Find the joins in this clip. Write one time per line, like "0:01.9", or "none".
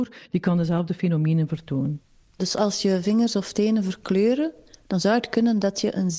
none